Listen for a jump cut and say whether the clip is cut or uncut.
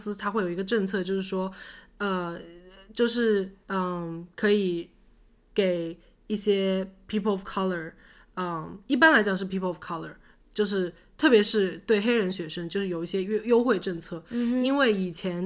uncut